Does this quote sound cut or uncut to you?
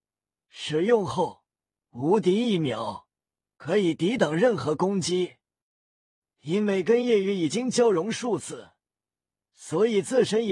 uncut